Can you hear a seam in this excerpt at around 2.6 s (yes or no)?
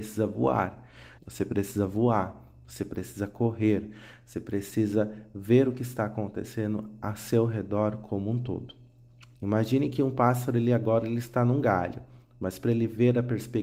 no